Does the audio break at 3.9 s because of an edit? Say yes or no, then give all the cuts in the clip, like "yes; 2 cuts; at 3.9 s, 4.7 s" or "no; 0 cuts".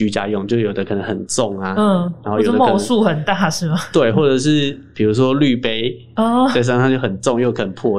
no; 1 cut; at 6.2 s